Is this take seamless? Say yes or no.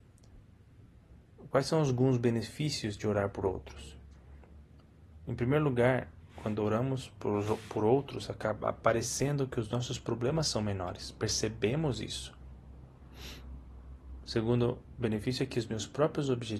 yes